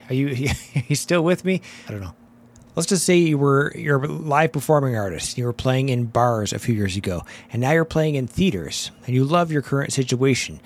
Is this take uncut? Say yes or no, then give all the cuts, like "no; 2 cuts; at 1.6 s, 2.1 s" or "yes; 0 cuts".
no; 1 cut; at 1.9 s